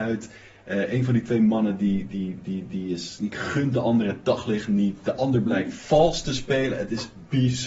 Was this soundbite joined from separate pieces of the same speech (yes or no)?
no